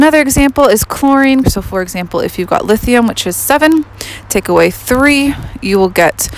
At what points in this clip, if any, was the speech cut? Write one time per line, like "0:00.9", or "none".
0:01.4